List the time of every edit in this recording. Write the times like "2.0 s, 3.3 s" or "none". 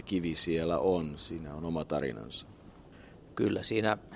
none